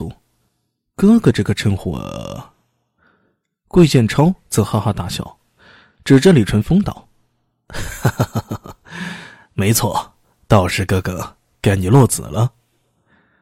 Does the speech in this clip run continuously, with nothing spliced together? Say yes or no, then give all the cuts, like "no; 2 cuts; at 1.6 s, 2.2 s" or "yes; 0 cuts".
yes; 0 cuts